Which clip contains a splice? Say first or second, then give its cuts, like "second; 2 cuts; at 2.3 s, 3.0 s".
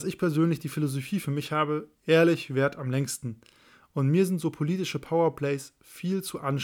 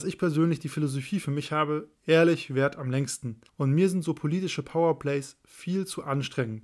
second; 1 cut; at 3.5 s